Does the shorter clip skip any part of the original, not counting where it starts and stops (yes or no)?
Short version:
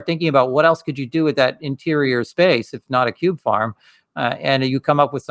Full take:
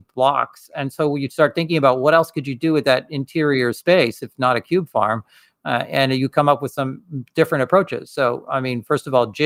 no